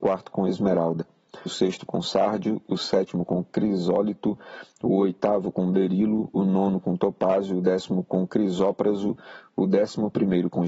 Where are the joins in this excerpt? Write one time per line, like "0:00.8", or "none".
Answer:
0:01.5